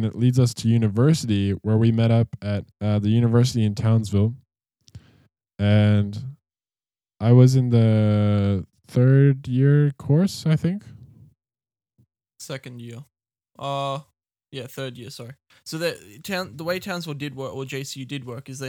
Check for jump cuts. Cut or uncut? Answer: cut